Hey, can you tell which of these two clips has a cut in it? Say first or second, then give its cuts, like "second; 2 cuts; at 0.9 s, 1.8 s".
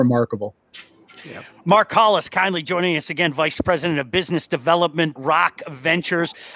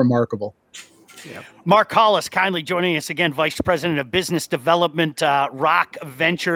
first; 1 cut; at 5.2 s